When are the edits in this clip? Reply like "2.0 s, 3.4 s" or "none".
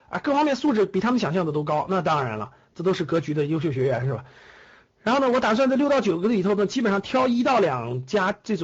none